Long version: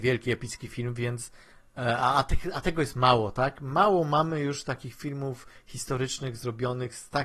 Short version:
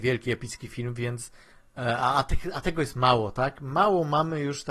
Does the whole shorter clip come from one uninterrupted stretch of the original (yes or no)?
yes